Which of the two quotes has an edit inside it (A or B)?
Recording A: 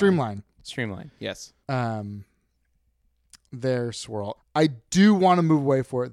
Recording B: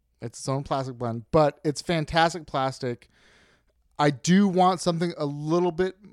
A